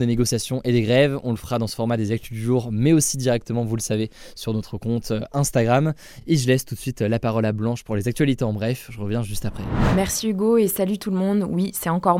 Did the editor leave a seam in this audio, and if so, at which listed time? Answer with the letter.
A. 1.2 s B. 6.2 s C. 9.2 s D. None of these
D